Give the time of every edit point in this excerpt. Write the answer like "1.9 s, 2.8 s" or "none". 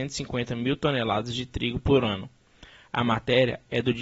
none